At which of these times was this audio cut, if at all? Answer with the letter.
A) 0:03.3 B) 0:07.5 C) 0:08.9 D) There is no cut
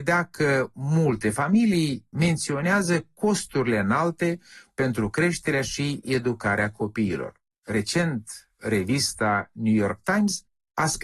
B